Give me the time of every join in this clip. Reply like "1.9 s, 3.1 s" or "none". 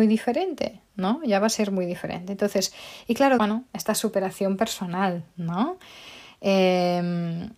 3.4 s